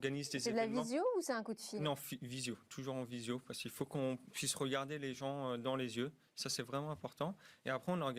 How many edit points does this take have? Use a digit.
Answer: 0